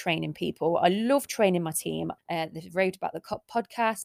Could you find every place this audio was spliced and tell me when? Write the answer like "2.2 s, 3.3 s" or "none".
2.2 s